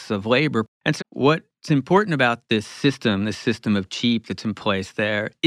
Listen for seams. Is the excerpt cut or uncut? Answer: cut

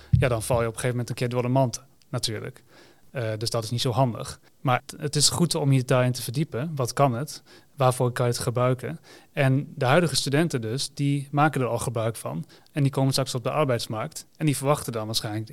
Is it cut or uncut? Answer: uncut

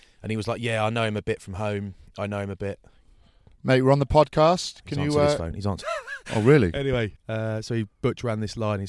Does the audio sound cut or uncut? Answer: cut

